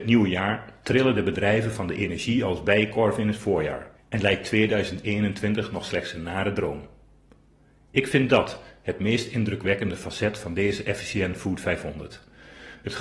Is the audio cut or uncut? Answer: cut